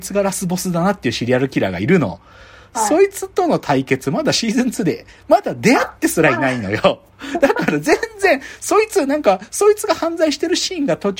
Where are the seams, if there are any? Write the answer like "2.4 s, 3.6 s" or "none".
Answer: none